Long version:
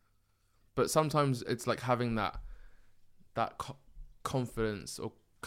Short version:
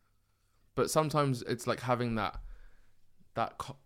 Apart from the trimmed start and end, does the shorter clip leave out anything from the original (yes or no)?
no